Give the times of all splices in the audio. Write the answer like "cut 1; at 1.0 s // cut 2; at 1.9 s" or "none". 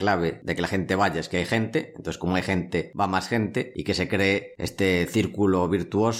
none

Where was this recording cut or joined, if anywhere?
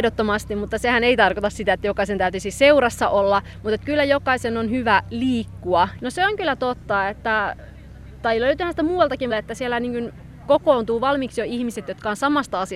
cut 1; at 6.0 s // cut 2; at 9.3 s

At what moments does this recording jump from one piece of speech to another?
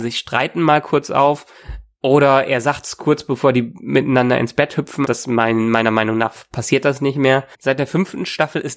cut 1; at 5.0 s // cut 2; at 7.5 s

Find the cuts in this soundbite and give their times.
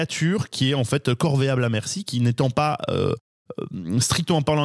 none

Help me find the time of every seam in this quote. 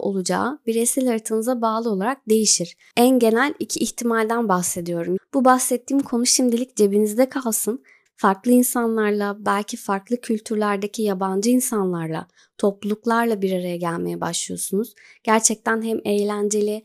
cut 1; at 5.2 s // cut 2; at 8.1 s

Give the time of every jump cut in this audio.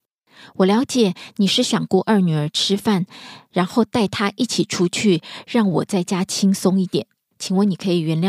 cut 1; at 7.3 s

